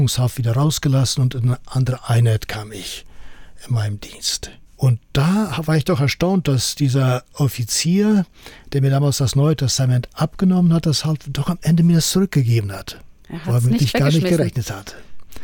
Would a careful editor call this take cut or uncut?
uncut